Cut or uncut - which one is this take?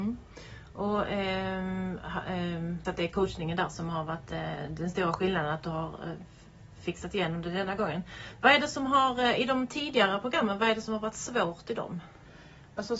cut